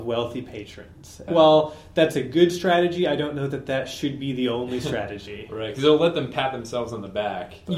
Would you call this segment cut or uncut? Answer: cut